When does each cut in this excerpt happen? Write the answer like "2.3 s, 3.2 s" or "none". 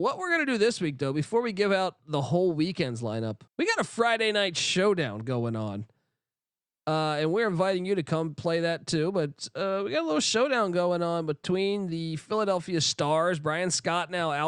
3.5 s